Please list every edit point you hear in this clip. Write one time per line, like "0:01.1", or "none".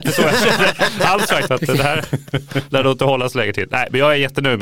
0:01.5